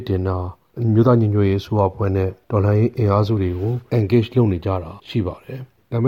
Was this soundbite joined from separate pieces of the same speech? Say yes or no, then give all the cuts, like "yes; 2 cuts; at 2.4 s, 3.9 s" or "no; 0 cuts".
yes; 1 cut; at 5.0 s